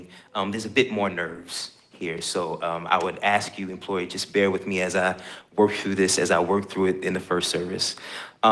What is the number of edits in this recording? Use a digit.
0